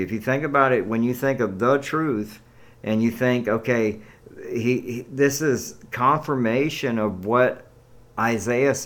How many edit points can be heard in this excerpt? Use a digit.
0